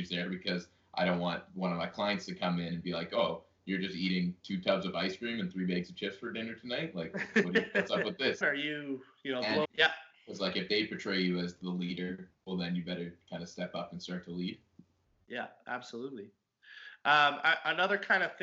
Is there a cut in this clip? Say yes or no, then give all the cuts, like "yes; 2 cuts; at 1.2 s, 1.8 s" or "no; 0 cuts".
yes; 2 cuts; at 8.4 s, 9.6 s